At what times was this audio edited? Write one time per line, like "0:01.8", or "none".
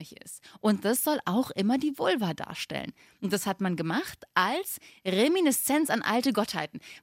none